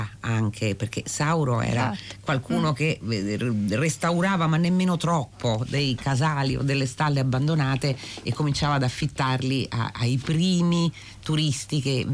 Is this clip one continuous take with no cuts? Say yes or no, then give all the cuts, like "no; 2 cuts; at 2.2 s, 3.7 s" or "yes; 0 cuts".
yes; 0 cuts